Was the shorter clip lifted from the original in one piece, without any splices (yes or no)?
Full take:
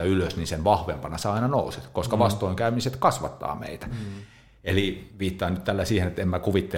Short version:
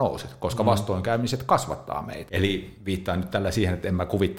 no